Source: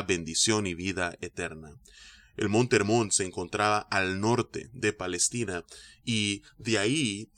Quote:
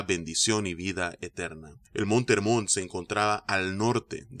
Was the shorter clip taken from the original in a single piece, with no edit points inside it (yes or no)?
no